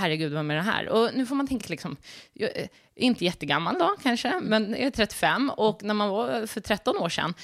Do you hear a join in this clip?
no; 0 cuts

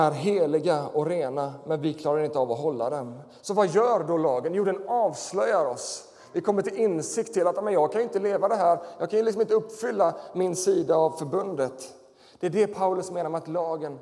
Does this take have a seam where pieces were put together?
no; 0 cuts

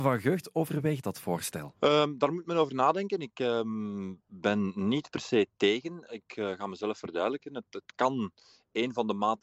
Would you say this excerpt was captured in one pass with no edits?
yes; 0 cuts

